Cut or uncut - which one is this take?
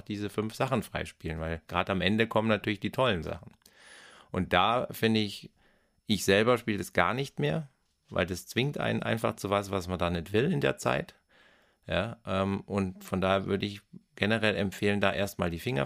uncut